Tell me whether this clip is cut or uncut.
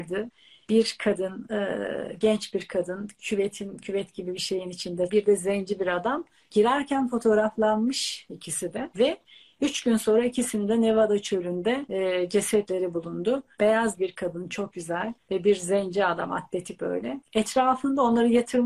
cut